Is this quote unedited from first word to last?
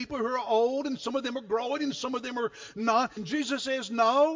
no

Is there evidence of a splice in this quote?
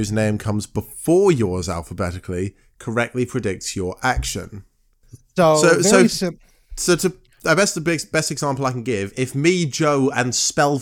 no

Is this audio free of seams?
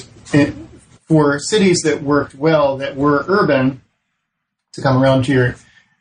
yes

